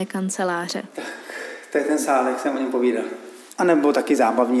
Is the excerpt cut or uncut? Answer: cut